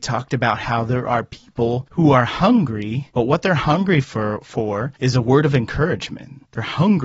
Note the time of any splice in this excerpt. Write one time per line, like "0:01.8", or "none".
none